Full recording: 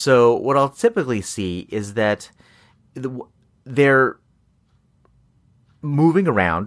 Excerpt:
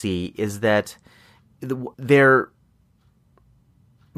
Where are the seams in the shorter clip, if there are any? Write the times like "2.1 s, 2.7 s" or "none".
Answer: 1.9 s